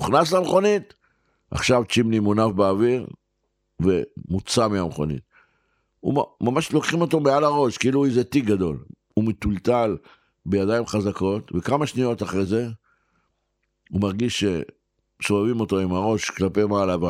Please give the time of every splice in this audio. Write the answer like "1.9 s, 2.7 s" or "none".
none